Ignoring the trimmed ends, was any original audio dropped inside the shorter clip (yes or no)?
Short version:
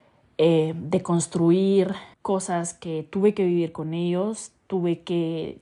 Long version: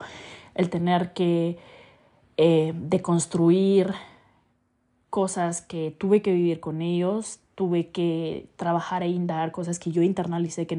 yes